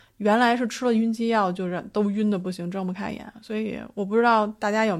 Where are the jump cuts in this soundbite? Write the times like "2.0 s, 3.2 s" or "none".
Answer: none

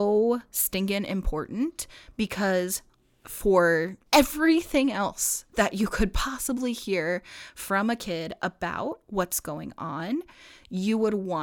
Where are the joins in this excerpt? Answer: 4.1 s

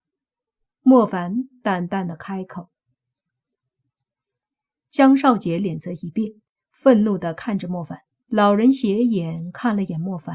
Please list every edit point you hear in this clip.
8.2 s

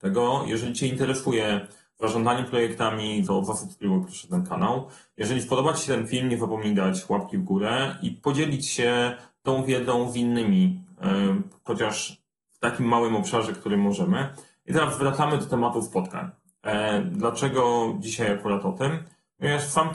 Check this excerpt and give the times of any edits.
3.3 s, 11.7 s

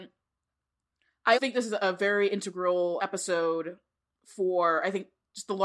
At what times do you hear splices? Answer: 1.3 s, 3.0 s

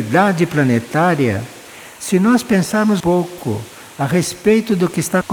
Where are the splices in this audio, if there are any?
3.0 s

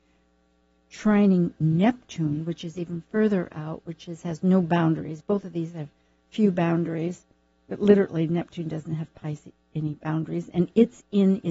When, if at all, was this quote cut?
none

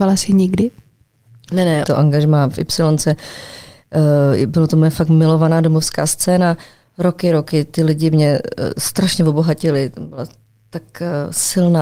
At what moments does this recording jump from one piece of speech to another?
1.8 s

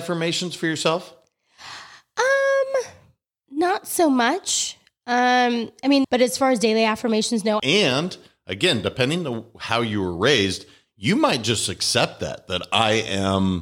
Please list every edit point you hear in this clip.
6.0 s, 7.6 s

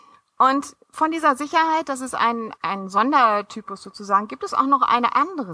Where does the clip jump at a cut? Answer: 2.6 s

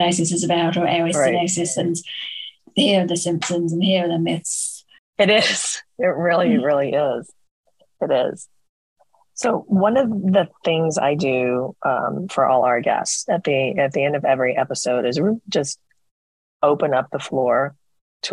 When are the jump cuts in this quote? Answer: 5.0 s

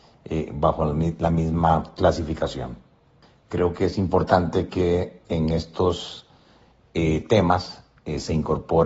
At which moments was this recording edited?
none

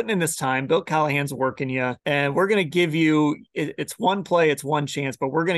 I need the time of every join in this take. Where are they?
2.0 s

